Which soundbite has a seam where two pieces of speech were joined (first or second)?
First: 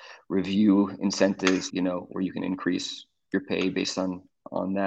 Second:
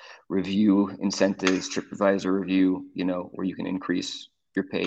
first